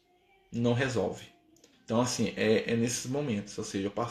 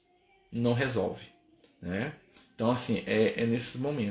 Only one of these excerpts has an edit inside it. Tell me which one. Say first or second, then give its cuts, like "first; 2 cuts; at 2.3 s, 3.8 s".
first; 1 cut; at 1.7 s